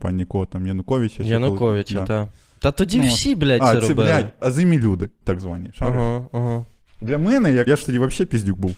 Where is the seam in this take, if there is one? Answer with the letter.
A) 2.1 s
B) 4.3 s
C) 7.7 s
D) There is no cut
C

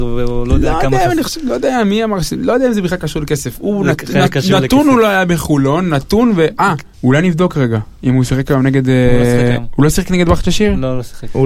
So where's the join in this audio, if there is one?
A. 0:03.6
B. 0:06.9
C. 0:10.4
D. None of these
B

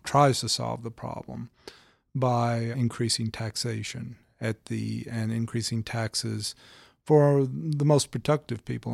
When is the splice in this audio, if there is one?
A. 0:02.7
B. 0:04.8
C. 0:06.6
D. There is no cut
A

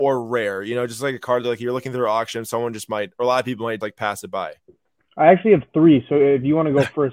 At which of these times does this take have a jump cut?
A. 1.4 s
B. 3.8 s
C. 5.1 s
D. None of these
B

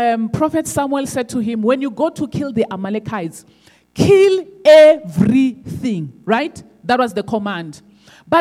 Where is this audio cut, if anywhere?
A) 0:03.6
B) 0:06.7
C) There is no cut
C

